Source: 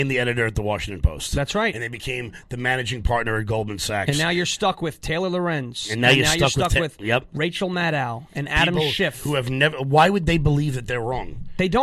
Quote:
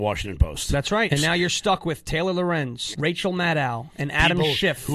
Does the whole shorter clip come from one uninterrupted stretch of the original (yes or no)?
no